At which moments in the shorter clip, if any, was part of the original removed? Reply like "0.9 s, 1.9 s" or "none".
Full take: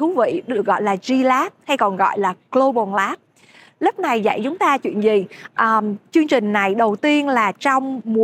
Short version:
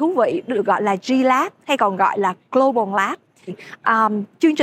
3.5 s

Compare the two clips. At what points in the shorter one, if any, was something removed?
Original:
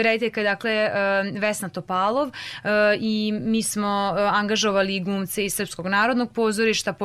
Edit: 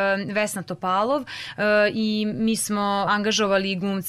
3.1 s

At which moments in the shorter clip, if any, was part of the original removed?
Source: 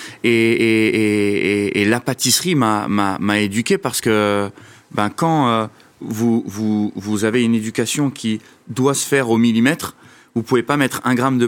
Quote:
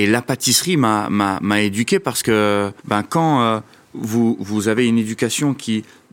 2.8 s, 4.4 s

